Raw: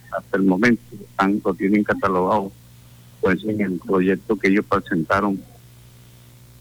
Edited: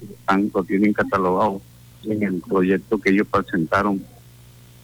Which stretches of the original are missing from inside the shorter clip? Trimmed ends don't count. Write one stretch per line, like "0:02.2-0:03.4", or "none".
0:02.9-0:03.4